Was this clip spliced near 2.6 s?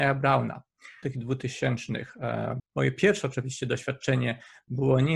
yes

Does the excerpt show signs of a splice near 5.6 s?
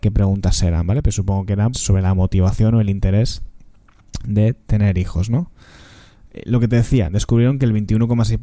no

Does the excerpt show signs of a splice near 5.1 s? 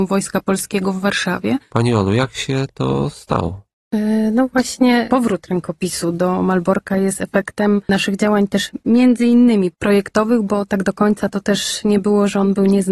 yes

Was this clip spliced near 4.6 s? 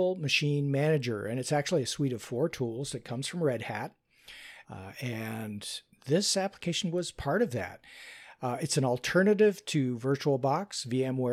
yes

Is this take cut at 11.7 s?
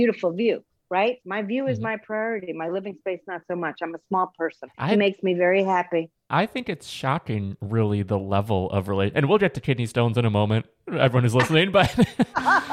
no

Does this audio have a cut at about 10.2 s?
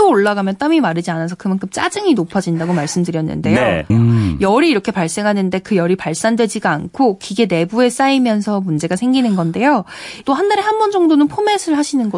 yes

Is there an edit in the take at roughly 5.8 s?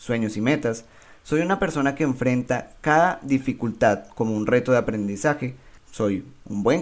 yes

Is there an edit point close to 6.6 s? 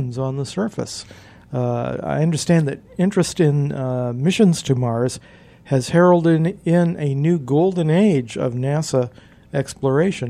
no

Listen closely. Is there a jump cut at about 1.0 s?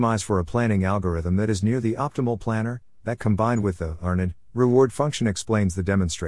no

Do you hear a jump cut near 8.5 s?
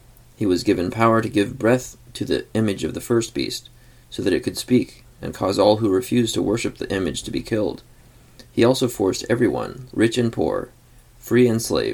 no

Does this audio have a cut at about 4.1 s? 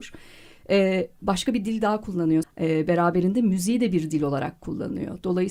no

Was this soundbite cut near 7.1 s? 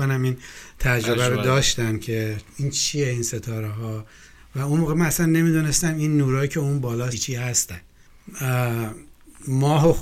yes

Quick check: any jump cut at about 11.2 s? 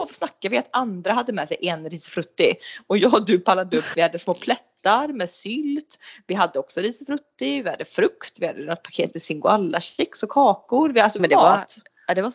yes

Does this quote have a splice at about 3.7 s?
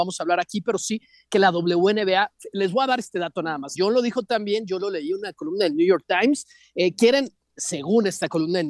yes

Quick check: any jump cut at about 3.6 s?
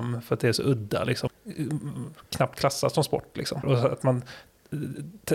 yes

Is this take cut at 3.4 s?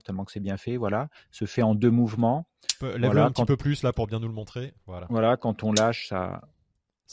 no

